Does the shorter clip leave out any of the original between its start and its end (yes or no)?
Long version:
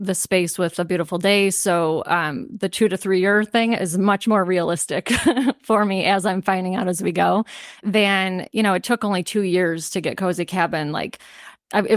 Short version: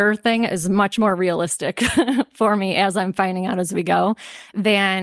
no